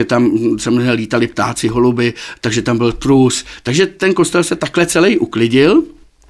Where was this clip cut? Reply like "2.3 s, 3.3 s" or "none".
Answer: none

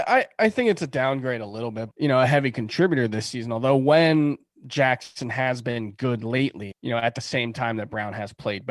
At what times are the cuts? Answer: 1.9 s, 6.7 s

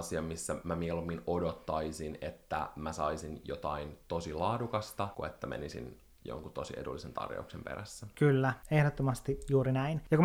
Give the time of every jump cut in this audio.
none

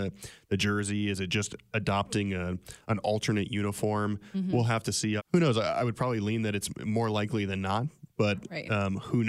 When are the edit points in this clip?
5.2 s

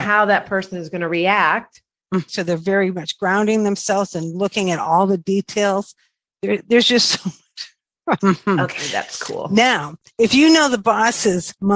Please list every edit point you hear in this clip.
2.3 s, 8.2 s

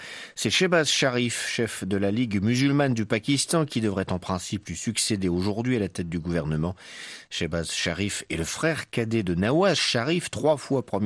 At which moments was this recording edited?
none

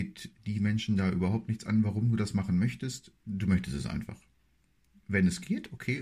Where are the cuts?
none

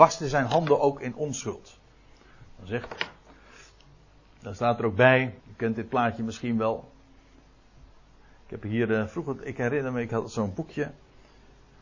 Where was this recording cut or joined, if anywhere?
5.4 s

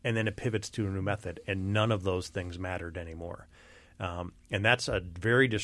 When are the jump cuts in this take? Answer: none

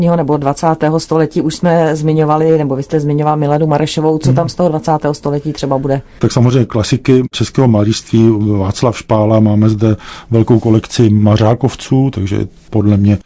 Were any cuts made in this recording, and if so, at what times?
none

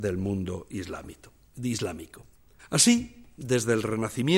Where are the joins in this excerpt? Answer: 2.6 s

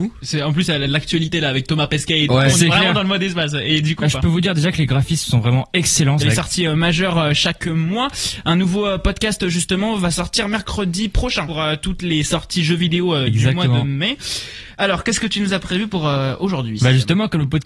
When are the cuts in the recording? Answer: 4.0 s, 6.2 s, 11.5 s

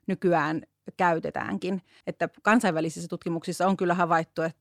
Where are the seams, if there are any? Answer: 2.0 s

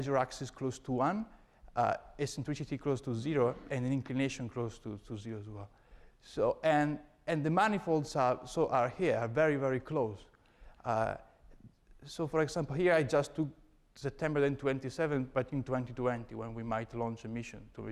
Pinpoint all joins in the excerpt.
none

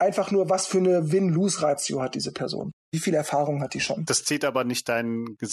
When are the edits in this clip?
none

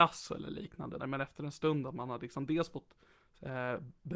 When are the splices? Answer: 1.0 s

